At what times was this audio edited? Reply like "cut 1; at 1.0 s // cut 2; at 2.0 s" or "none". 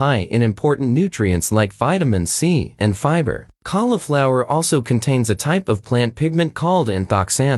cut 1; at 2.8 s